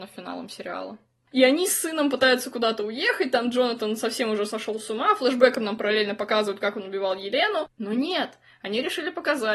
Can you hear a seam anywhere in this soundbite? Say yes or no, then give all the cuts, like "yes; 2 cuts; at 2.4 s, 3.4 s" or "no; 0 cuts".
yes; 2 cuts; at 1.3 s, 7.8 s